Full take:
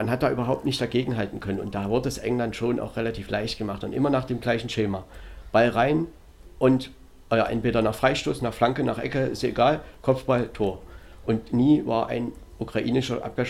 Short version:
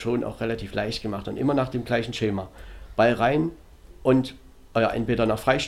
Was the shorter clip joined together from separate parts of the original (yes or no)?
no